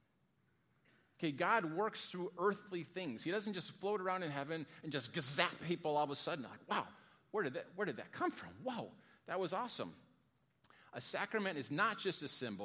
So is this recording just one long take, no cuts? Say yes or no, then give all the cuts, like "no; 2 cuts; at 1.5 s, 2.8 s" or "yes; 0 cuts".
yes; 0 cuts